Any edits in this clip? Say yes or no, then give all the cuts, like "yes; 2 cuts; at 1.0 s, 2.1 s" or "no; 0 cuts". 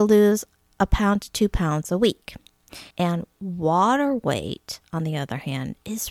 yes; 1 cut; at 2.9 s